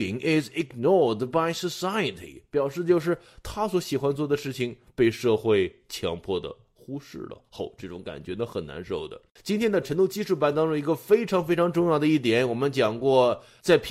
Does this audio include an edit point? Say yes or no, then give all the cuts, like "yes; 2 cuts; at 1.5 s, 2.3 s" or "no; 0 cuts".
yes; 1 cut; at 9.4 s